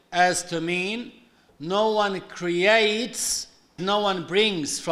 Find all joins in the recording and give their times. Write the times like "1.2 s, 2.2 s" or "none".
3.8 s